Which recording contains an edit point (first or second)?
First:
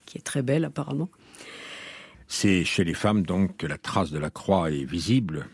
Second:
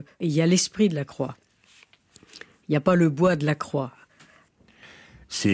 first